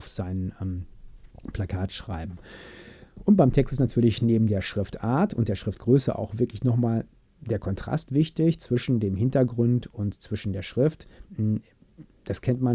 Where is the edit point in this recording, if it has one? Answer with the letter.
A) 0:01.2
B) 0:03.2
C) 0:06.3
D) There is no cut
D